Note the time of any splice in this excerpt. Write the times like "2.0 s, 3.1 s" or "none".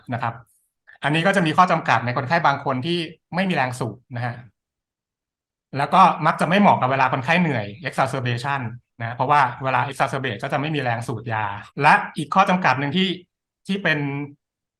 4.0 s, 11.7 s